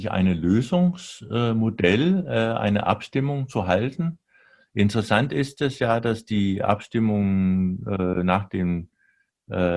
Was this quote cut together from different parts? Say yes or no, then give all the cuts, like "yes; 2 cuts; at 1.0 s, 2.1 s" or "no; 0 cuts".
no; 0 cuts